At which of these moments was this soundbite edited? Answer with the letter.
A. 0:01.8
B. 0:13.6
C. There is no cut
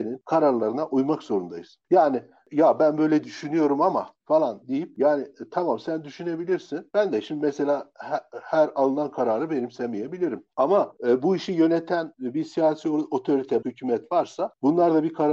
B